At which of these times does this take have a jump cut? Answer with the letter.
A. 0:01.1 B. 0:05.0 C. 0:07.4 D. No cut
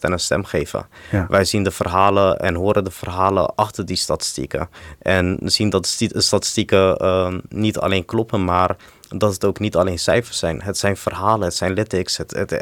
B